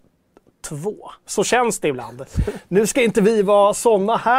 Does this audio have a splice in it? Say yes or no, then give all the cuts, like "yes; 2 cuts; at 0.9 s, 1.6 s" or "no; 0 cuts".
yes; 1 cut; at 1.2 s